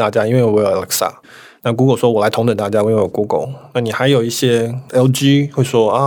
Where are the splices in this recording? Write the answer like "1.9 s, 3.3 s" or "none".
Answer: none